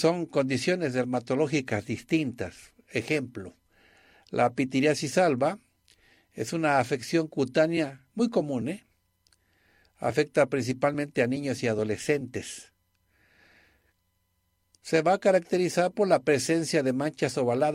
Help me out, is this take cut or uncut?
uncut